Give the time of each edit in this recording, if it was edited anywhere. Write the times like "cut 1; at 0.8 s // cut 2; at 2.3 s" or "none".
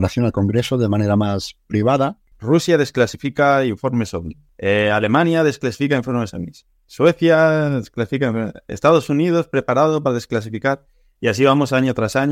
cut 1; at 2.3 s